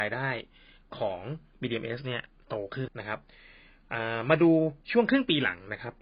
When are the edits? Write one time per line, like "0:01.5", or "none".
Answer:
0:02.9
0:04.8